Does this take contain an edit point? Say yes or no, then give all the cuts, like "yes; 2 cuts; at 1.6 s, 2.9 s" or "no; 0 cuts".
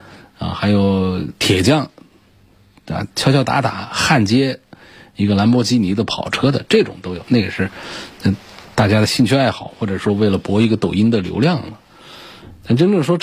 yes; 1 cut; at 7.2 s